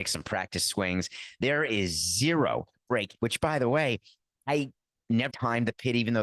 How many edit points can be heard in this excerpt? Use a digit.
2